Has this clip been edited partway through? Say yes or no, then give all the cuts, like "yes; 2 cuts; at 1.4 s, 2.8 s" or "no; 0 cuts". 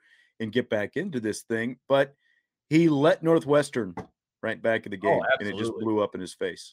no; 0 cuts